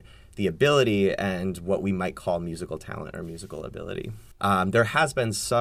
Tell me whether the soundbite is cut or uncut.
cut